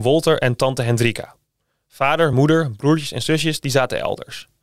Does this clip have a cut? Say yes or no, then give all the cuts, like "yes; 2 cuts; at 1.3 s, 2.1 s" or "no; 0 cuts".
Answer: no; 0 cuts